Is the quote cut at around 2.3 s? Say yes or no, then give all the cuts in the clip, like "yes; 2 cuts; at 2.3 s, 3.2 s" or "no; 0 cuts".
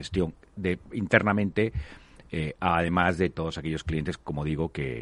no; 0 cuts